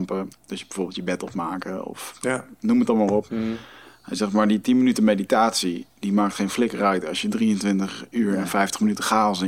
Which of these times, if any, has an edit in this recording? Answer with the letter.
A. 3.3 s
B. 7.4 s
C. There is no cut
A